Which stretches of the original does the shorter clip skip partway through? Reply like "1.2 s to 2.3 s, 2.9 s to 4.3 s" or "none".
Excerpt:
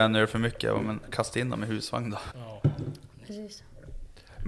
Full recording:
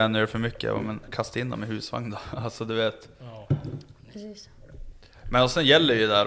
2.3 s to 3.2 s